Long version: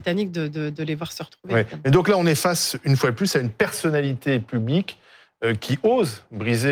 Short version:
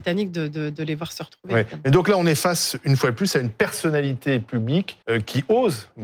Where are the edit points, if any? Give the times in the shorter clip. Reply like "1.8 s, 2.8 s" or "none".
5.0 s

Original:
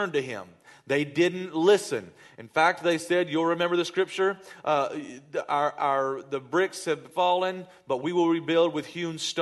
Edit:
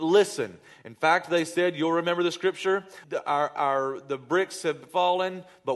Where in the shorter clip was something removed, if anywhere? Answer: 3.0 s

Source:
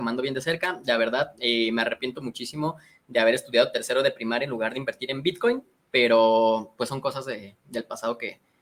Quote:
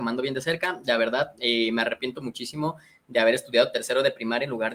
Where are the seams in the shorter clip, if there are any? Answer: none

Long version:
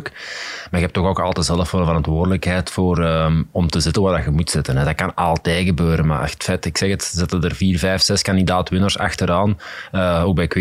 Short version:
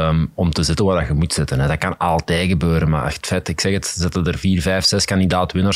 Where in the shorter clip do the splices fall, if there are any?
none

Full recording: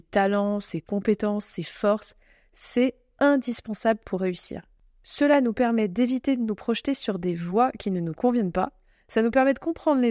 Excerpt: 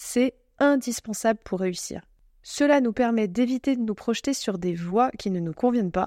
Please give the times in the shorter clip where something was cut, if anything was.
none

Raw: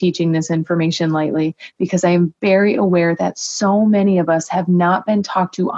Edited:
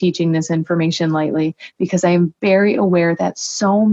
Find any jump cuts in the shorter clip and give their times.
none

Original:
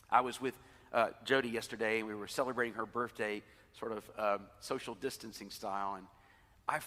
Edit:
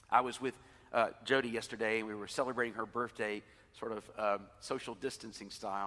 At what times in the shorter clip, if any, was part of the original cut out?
none

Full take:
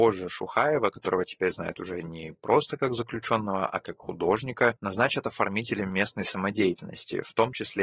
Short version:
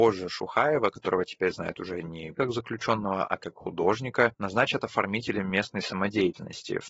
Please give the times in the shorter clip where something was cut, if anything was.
2.4 s

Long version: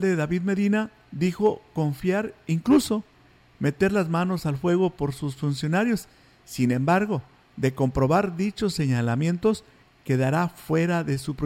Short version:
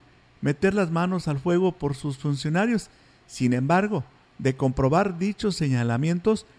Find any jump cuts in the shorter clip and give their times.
none

